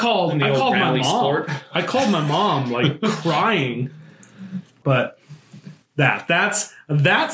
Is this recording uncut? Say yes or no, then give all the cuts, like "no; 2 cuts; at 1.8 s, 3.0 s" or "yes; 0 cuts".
no; 1 cut; at 4.8 s